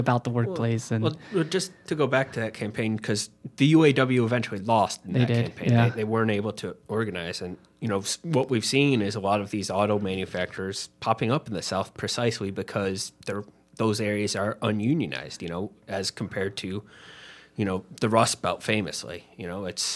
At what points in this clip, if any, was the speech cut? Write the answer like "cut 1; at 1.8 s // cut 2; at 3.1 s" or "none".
none